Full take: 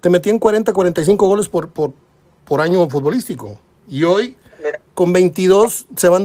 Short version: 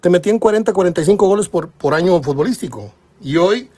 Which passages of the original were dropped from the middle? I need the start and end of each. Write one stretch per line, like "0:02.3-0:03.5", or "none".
0:01.7-0:02.4